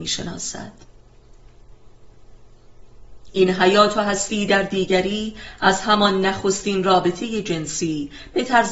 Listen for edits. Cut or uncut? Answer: uncut